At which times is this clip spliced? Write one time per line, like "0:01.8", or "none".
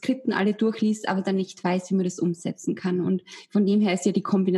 none